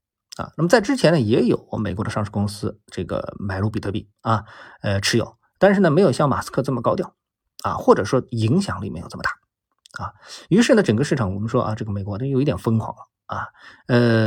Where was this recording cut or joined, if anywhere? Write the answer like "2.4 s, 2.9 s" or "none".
none